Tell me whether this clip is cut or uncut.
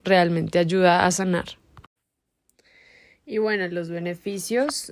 uncut